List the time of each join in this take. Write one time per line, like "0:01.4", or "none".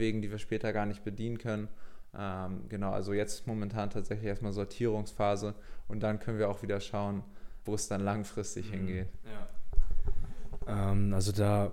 0:07.7